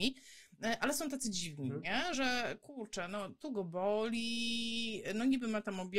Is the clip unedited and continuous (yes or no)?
yes